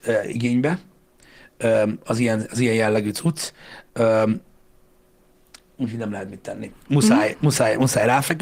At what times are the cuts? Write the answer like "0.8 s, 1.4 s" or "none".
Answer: 6.8 s